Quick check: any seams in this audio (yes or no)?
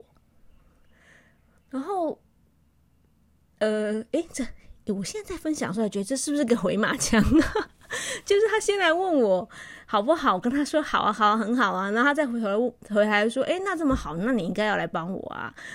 no